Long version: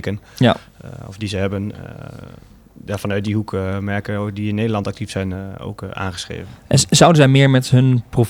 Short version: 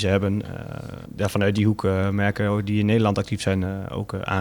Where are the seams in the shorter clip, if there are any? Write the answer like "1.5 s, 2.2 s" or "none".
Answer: 1.1 s